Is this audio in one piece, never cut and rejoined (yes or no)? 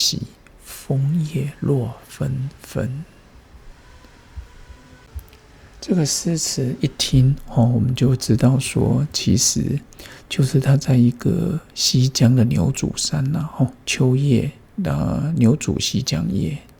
yes